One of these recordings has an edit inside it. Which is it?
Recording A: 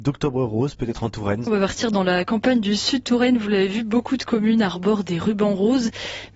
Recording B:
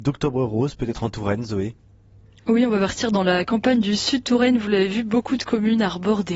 A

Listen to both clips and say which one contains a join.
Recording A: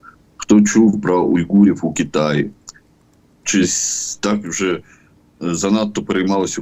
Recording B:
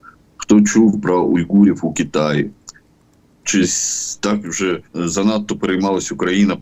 B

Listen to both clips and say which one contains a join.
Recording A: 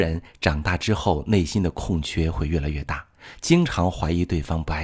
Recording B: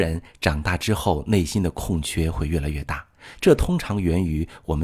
B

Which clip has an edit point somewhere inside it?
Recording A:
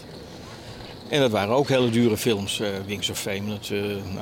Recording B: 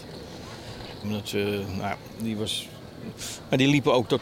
B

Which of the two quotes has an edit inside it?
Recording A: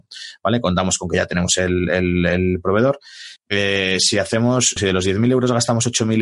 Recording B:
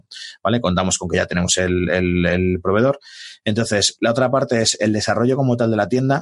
A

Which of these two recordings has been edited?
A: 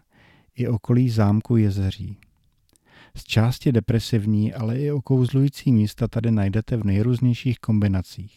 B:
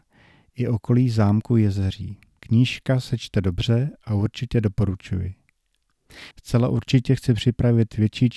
B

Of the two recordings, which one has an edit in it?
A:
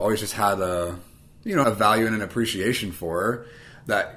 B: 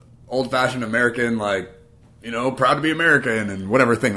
A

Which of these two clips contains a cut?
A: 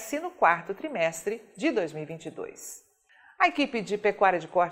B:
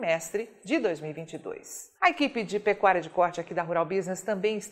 B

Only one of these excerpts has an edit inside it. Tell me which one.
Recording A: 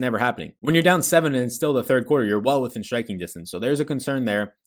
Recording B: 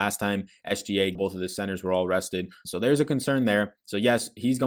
B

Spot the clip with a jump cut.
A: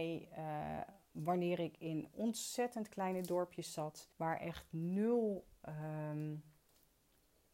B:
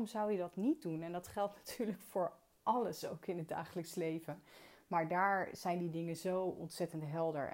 A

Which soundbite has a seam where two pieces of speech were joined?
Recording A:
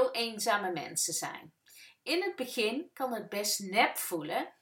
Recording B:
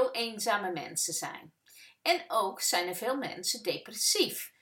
A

